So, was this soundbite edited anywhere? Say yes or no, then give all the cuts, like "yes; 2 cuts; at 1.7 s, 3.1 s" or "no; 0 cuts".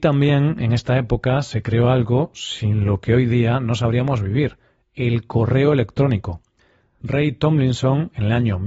no; 0 cuts